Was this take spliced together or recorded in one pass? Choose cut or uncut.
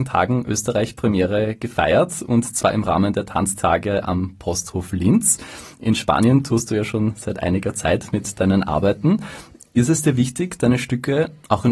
uncut